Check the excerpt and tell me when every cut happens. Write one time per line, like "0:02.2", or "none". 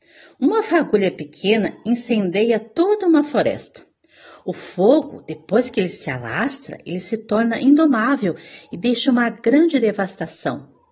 none